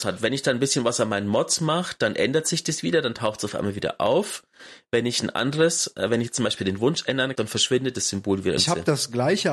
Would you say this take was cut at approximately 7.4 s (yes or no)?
yes